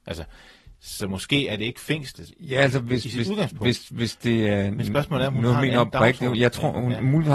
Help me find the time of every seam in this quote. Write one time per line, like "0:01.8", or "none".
0:02.3

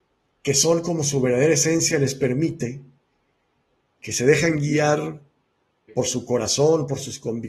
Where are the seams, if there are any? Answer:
0:05.9

